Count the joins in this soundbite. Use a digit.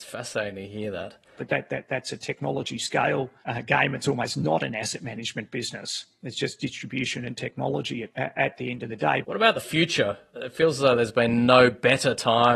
2